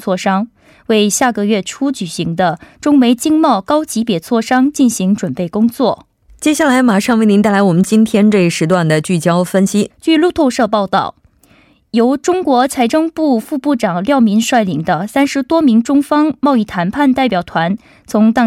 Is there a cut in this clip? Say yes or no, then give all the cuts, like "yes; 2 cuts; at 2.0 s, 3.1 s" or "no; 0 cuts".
yes; 2 cuts; at 6.3 s, 9.9 s